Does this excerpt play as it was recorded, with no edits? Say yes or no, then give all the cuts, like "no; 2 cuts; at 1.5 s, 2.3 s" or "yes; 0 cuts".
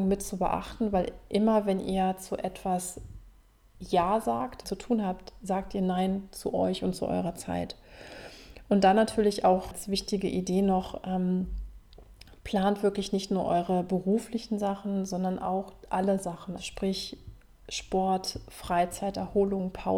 no; 2 cuts; at 4.6 s, 16.6 s